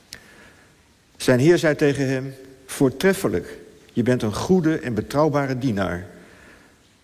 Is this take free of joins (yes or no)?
yes